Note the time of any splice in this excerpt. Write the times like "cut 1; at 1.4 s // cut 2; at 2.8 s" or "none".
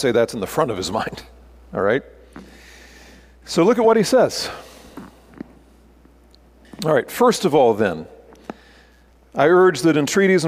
none